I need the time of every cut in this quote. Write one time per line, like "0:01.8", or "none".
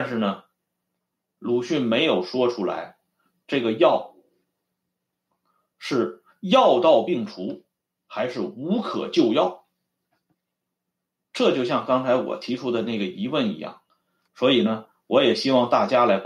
0:14.2